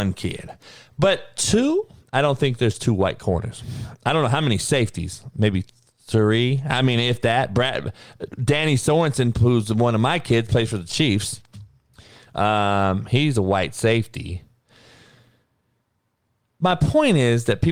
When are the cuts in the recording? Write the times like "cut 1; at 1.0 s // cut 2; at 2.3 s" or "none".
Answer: none